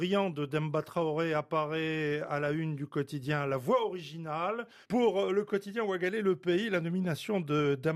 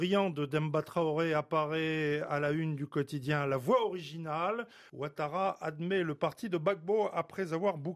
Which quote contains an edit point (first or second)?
first